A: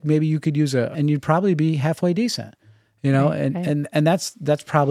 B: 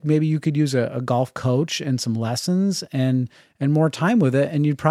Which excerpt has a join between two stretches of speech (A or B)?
A